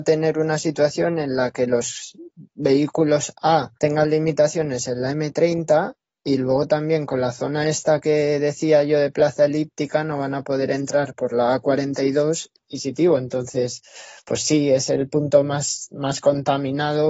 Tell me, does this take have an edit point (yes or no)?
yes